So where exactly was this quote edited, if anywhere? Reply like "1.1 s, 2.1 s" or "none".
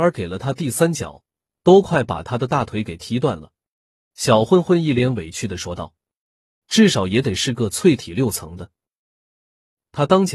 4.1 s, 6.6 s